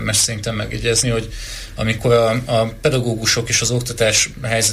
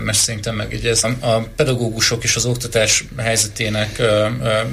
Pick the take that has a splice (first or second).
second